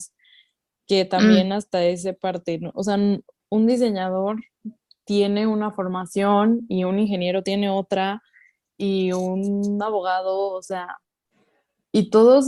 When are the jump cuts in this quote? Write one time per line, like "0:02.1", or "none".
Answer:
none